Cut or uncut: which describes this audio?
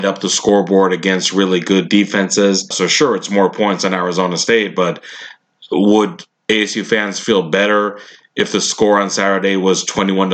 cut